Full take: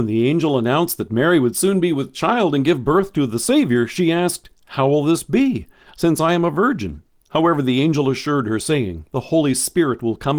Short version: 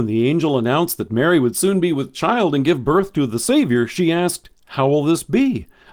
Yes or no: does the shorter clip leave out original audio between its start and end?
no